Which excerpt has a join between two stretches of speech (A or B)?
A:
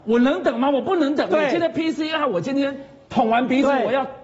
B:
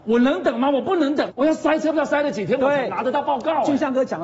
B